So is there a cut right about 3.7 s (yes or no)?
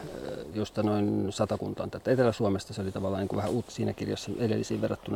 yes